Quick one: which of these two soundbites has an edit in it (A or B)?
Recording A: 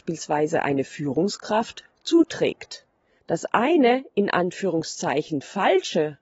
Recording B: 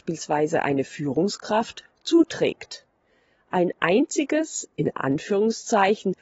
A